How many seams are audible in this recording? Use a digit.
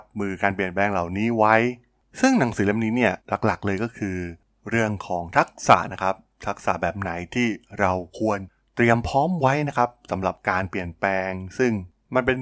1